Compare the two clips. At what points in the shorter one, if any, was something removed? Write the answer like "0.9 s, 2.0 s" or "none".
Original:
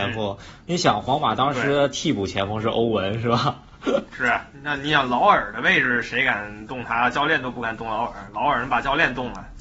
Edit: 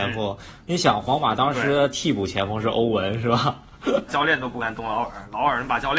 4.1 s